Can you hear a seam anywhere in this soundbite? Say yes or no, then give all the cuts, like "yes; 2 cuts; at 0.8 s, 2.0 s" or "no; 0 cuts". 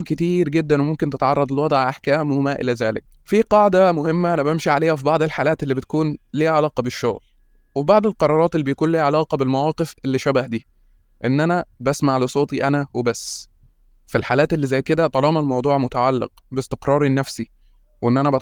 no; 0 cuts